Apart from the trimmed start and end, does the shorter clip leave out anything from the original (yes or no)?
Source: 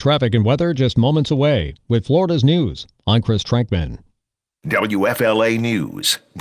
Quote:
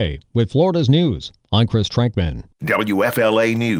yes